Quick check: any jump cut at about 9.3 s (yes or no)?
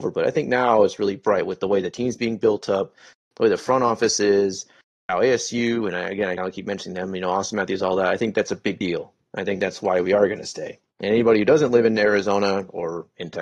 no